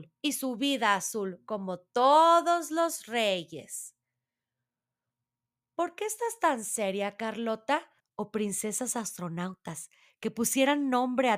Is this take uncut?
no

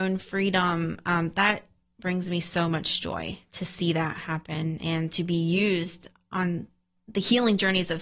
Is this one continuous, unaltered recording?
yes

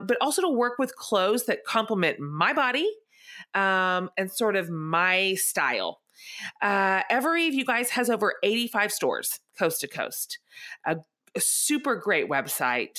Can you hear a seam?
no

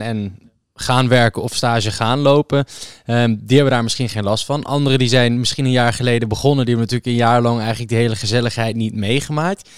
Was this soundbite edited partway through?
no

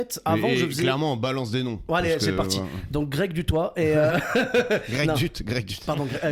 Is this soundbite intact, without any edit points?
yes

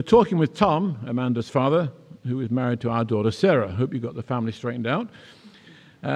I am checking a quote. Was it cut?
no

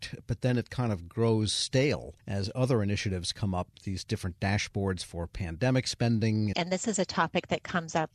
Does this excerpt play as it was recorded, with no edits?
no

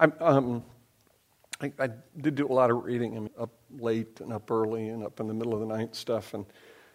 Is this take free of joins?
no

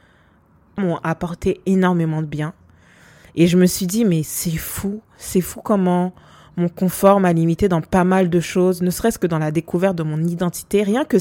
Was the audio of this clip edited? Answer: no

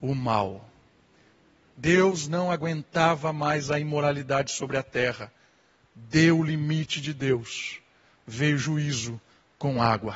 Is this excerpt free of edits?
yes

